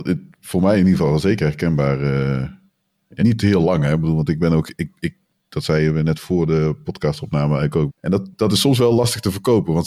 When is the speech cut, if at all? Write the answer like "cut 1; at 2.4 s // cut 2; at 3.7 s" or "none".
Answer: cut 1; at 3.2 s // cut 2; at 7.9 s